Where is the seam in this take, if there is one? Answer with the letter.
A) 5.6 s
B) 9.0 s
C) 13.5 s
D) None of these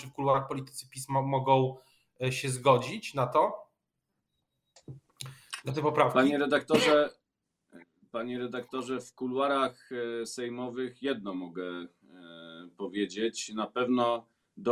D